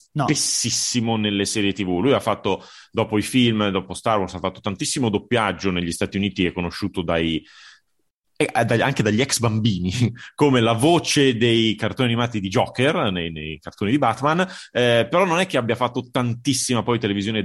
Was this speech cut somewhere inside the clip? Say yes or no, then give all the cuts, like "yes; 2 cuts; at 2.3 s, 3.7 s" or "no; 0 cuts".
no; 0 cuts